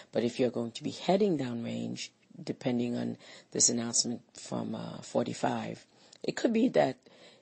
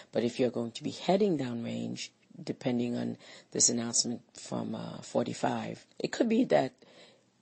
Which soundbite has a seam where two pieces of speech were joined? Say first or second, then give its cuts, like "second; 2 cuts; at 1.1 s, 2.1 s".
second; 1 cut; at 5.9 s